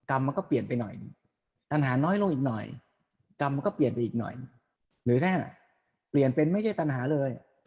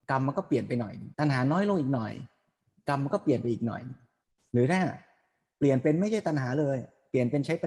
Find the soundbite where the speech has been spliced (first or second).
second